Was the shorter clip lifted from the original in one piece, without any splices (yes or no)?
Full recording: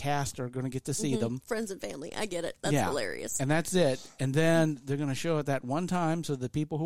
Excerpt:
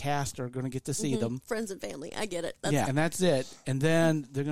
no